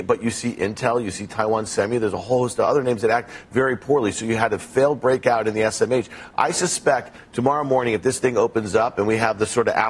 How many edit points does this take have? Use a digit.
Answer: 0